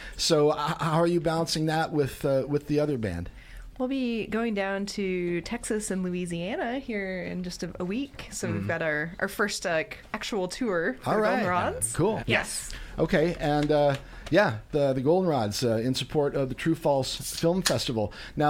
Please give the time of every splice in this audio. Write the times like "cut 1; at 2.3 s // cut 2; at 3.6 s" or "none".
cut 1; at 12.2 s